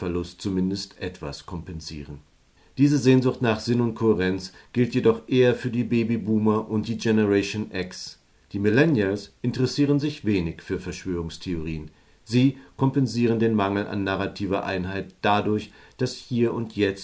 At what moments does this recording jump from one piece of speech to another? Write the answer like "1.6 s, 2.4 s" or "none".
none